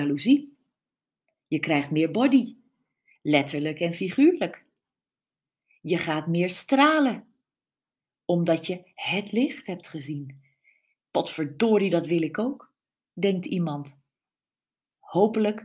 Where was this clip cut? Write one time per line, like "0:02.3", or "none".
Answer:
0:11.1